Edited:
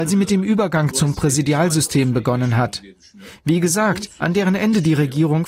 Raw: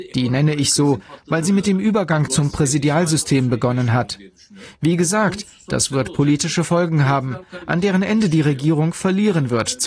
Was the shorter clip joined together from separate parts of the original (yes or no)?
yes